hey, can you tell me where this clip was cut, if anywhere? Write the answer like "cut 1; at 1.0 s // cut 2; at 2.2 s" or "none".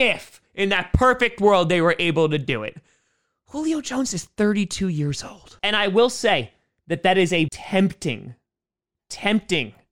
cut 1; at 5.6 s // cut 2; at 7.5 s